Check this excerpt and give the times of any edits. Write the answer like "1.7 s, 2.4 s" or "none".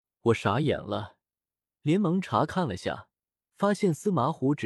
none